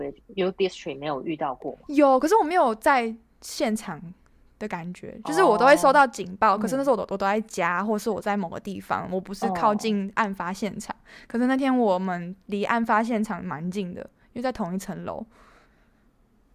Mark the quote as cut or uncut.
uncut